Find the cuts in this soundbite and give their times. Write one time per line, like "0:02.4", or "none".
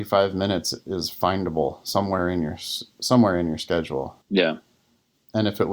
0:04.2

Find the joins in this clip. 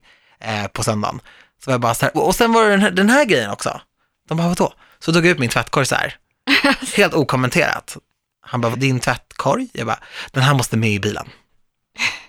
0:02.1
0:08.7

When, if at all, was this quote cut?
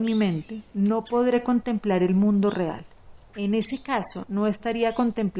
0:03.3

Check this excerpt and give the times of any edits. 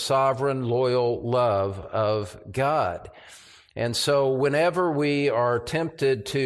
none

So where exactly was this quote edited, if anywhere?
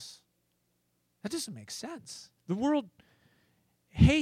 0:02.4

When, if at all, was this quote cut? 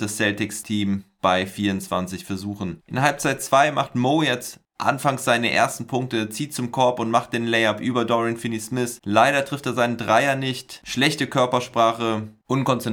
0:10.8

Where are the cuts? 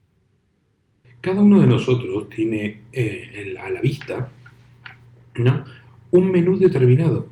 0:01.0

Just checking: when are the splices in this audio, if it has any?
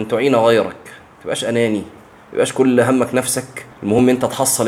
0:03.7

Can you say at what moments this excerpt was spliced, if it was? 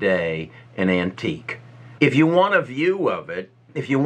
0:02.0

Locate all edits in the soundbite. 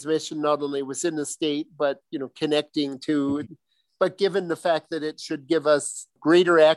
0:03.4

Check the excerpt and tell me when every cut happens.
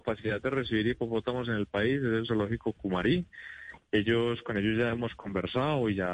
none

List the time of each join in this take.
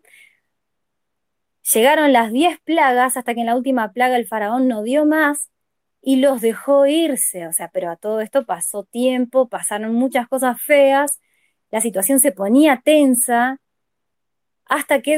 none

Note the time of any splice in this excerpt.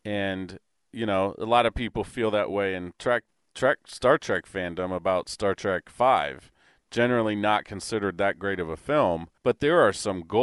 0:09.4

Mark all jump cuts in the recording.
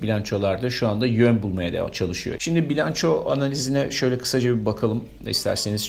0:02.4

